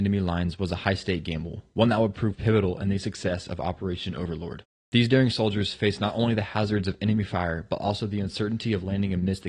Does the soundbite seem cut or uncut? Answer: uncut